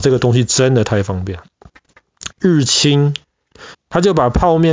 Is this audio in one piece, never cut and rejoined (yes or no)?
no